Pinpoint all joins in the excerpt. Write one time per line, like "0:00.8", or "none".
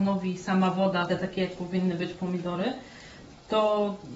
0:01.1